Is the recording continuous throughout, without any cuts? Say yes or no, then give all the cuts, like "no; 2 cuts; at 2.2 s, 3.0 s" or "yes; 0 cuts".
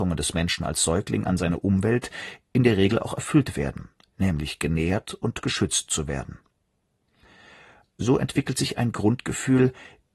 yes; 0 cuts